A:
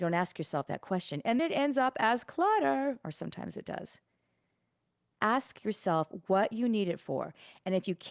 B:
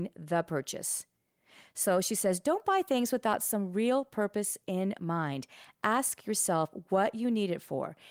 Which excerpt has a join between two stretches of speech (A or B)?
A